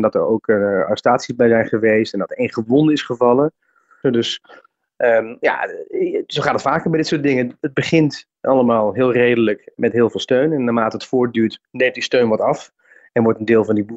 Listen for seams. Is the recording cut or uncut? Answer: cut